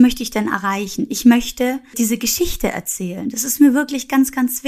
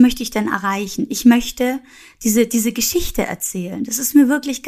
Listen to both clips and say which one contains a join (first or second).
first